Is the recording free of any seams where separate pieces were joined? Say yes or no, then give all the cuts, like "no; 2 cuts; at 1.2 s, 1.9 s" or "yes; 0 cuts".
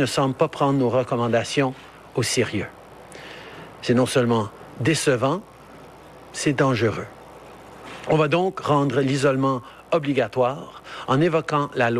yes; 0 cuts